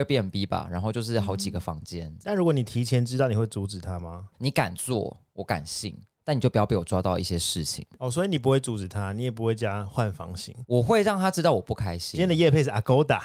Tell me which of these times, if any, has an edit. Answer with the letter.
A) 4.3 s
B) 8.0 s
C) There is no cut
A